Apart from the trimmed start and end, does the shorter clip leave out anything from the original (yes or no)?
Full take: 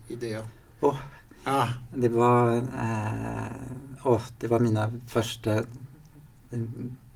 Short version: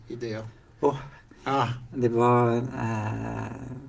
no